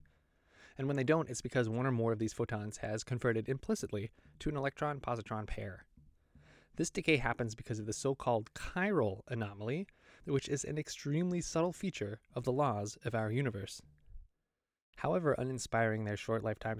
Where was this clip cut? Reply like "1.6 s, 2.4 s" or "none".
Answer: 14.9 s